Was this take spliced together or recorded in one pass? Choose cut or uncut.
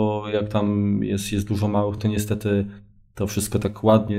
uncut